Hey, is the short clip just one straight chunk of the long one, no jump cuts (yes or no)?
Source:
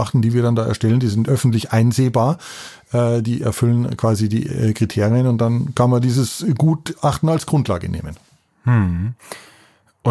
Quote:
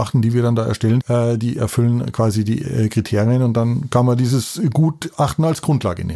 no